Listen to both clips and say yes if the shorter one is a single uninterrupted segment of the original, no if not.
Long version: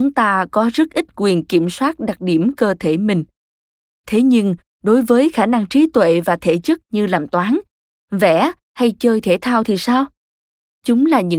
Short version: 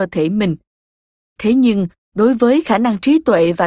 yes